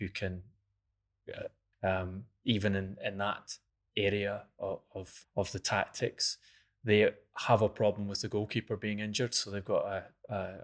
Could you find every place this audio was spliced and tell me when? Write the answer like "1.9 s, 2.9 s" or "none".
1.7 s, 5.2 s